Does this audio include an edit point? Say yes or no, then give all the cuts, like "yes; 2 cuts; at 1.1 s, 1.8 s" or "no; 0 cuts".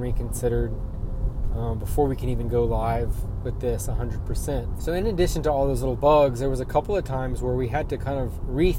yes; 1 cut; at 4.8 s